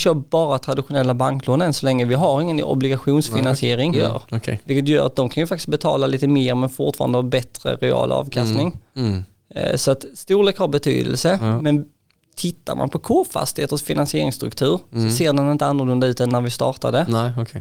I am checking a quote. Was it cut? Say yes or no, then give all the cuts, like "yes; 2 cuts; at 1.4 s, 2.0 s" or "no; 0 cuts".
yes; 1 cut; at 3.9 s